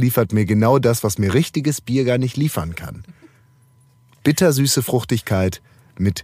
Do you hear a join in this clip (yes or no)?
no